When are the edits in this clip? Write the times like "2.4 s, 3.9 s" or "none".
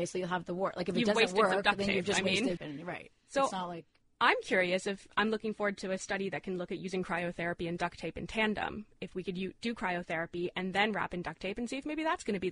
2.6 s